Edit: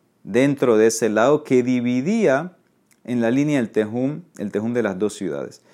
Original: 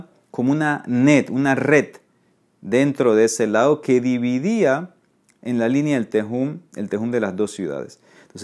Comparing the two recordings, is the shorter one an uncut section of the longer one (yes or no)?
yes